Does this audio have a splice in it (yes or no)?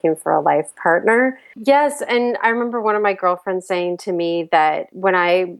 yes